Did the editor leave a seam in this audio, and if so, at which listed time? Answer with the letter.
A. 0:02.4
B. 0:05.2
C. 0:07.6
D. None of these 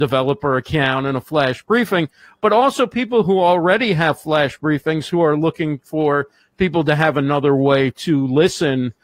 D